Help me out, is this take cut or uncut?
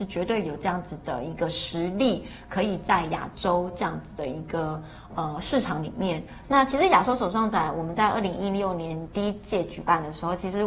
cut